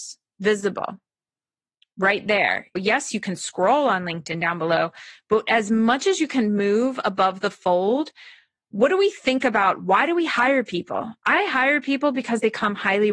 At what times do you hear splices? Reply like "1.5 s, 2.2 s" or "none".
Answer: 2.8 s